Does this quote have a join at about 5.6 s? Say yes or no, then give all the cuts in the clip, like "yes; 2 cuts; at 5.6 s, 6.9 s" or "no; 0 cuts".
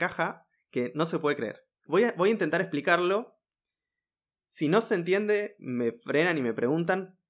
no; 1 cut; at 1.9 s